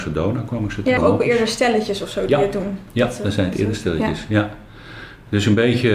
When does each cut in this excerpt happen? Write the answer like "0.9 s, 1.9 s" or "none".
1.0 s